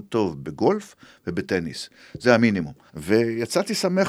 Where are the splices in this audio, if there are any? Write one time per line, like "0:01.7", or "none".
0:02.9